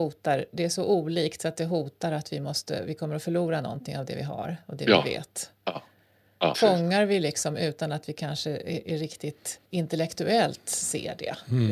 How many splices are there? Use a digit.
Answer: 2